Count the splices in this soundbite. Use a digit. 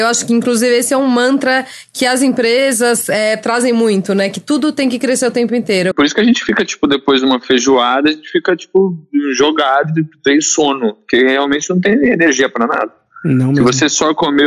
1